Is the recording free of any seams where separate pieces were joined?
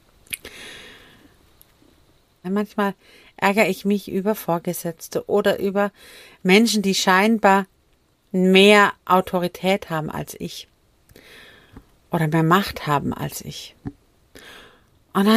no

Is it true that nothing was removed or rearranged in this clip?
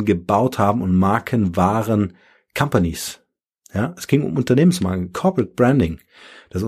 yes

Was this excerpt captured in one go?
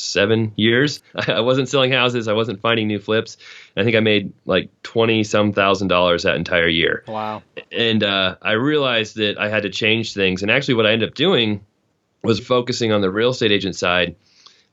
no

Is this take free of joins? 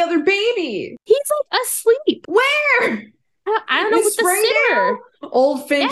yes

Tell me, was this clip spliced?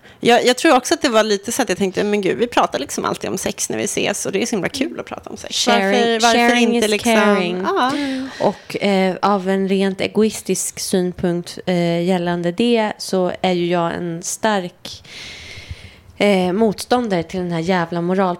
no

